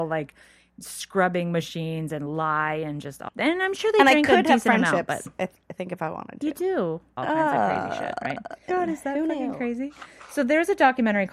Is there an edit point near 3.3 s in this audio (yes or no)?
yes